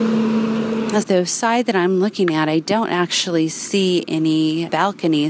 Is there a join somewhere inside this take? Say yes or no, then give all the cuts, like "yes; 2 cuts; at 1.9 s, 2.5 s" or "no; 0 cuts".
yes; 1 cut; at 1.0 s